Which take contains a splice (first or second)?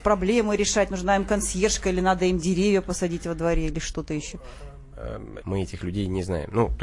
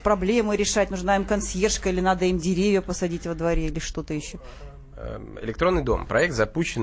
first